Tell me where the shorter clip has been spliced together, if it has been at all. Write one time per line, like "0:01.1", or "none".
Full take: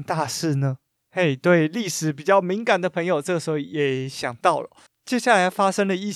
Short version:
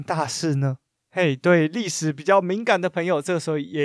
none